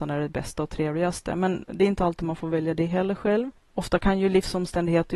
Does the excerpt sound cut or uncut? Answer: uncut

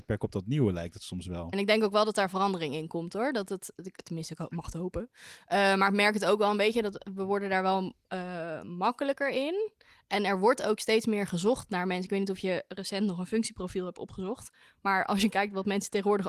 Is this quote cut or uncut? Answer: cut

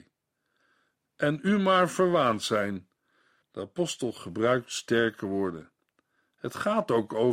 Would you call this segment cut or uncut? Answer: cut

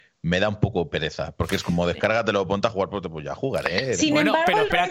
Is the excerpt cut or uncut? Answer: uncut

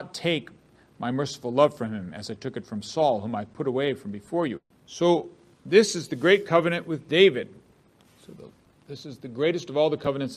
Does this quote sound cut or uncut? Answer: cut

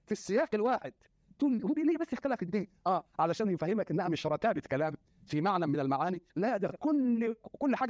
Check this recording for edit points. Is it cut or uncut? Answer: uncut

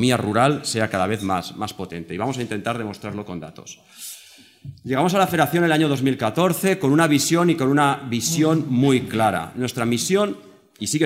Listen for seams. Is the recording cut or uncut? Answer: uncut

